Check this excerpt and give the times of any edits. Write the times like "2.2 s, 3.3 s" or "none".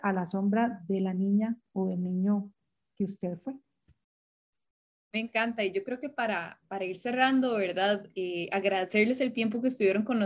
none